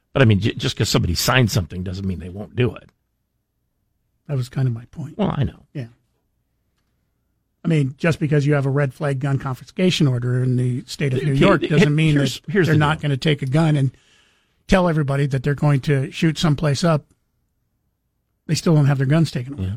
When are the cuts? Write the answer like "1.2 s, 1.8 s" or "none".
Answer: none

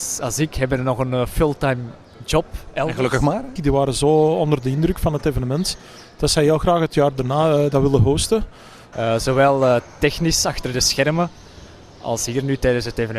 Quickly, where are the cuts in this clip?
3.6 s, 8.9 s

